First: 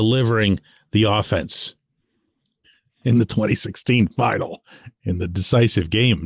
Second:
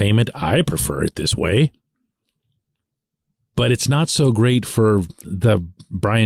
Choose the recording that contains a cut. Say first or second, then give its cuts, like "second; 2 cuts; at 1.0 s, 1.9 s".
first; 1 cut; at 2.6 s